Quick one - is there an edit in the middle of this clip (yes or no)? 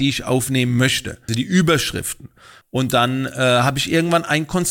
yes